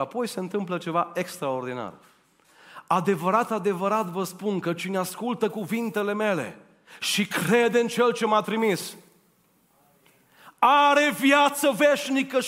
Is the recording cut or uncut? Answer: uncut